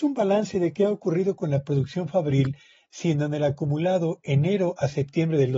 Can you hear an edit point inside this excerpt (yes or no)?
yes